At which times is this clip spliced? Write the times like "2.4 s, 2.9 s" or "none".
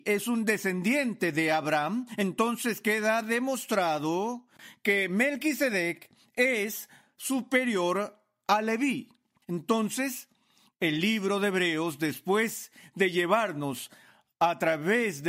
9.4 s